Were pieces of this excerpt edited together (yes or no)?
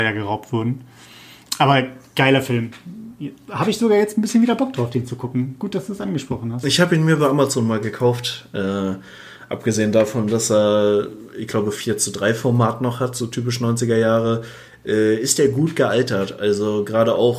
no